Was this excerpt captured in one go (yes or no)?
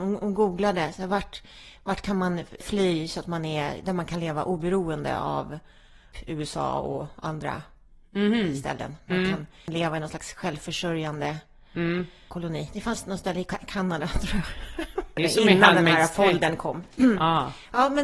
yes